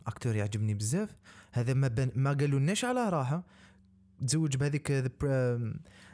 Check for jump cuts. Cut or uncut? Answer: uncut